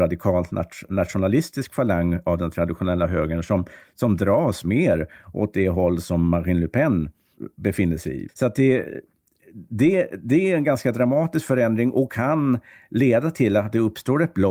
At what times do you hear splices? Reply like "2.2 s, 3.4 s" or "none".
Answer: none